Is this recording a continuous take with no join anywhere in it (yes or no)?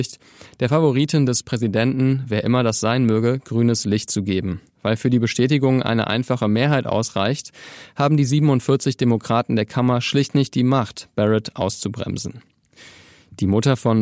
no